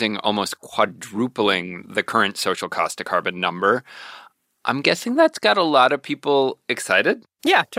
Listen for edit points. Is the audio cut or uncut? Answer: uncut